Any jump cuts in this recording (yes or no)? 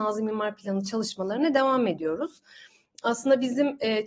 no